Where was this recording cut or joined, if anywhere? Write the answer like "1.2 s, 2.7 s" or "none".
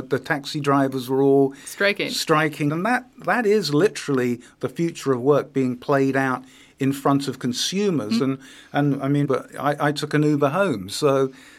2.7 s, 8.2 s, 9.2 s